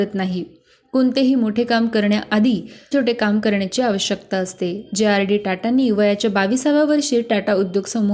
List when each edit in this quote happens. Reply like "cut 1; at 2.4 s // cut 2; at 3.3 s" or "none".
cut 1; at 2.9 s